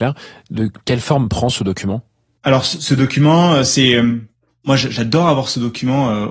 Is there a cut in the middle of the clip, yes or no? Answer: no